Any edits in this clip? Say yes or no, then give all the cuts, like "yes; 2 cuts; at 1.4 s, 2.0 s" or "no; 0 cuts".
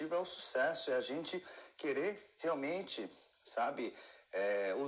no; 0 cuts